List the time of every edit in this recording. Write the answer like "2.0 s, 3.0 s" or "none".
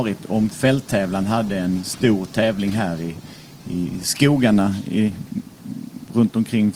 none